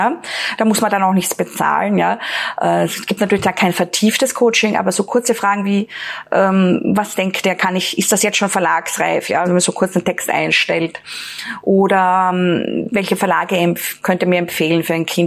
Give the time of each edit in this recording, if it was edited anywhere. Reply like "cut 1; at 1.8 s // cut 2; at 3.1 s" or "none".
cut 1; at 9.4 s